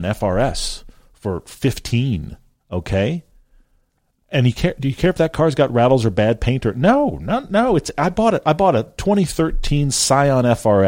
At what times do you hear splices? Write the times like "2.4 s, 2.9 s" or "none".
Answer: none